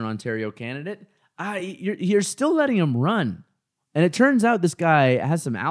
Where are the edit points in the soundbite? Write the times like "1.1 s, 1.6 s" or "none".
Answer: none